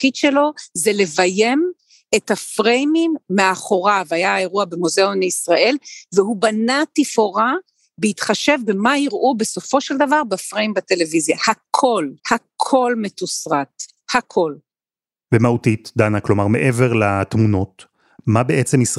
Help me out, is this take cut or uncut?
cut